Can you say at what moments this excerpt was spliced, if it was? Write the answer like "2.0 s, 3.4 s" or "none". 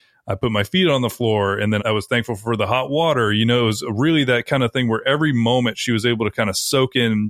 1.8 s